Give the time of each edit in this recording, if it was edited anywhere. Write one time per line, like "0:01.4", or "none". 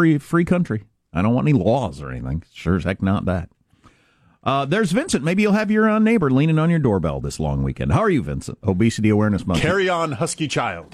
0:08.6

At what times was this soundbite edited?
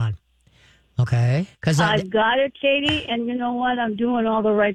0:01.5

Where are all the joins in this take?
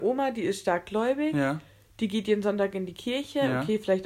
none

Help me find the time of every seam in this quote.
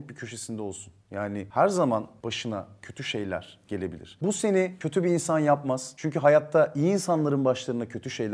none

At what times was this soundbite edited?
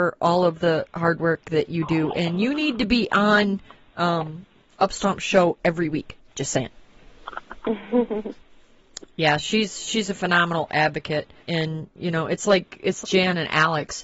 0:11.4
0:13.0

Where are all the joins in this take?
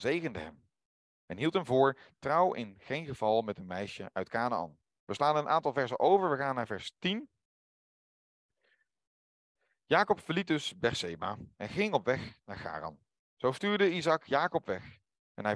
0:05.0
0:13.3

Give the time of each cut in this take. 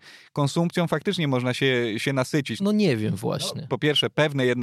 0:02.6
0:03.7

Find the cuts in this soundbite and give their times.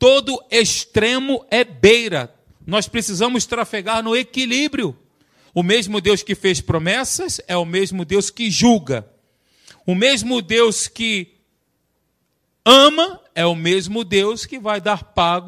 0:05.5

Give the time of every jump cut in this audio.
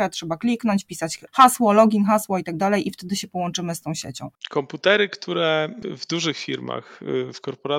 0:04.4

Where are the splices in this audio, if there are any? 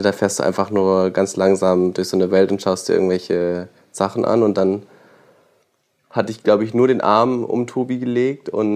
none

